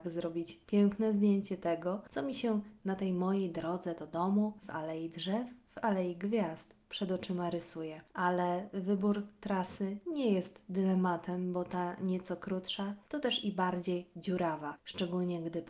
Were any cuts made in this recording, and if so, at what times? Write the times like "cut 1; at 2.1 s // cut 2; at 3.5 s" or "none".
cut 1; at 8.1 s